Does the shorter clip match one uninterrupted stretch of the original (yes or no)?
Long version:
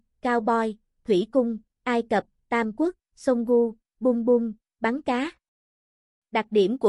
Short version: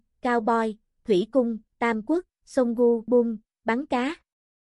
no